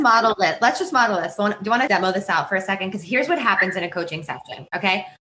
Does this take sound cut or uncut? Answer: cut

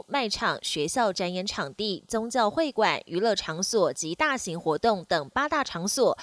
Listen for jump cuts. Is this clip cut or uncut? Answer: uncut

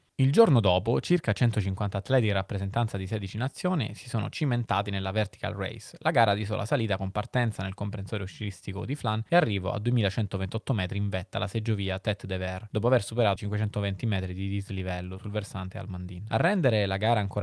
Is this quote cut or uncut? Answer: cut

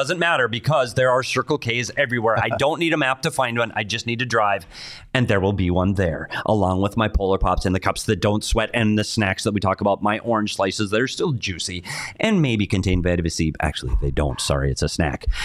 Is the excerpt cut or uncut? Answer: uncut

